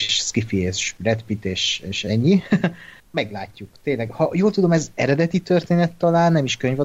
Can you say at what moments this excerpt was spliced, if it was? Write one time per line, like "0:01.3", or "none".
0:03.0